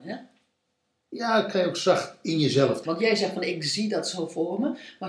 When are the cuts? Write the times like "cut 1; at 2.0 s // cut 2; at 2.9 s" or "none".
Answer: cut 1; at 2.8 s